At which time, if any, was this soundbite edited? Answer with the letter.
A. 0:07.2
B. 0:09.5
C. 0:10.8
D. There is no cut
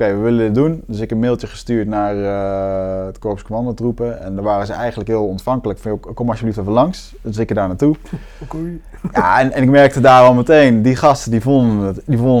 D